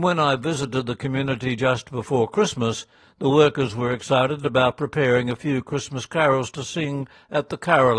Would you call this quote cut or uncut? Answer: uncut